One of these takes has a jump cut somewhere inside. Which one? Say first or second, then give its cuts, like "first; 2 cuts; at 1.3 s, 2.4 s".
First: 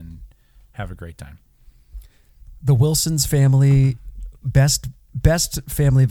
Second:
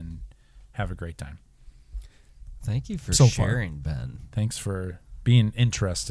second; 1 cut; at 2.6 s